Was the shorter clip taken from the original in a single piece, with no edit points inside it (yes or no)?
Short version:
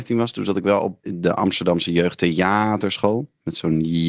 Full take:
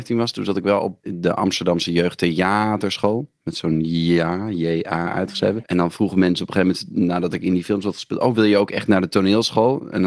yes